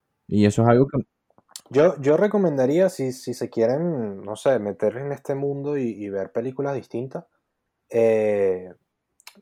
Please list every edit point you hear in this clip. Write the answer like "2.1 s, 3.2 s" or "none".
1.6 s